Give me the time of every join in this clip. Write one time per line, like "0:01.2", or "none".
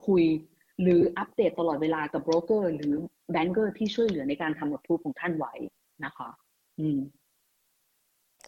none

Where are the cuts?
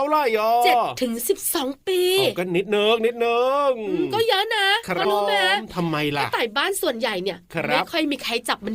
0:05.0

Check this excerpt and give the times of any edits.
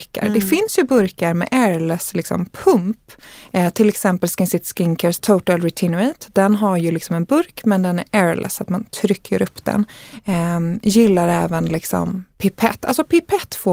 0:05.2

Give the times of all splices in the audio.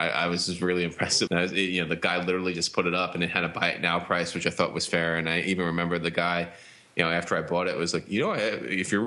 0:01.3

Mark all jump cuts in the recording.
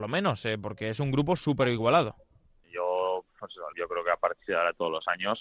0:02.6
0:03.7

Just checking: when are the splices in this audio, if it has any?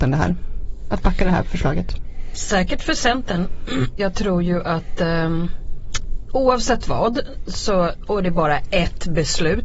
0:04.0

